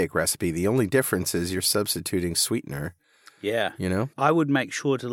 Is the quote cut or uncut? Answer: uncut